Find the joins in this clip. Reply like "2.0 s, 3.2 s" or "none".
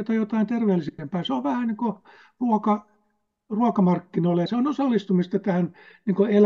4.5 s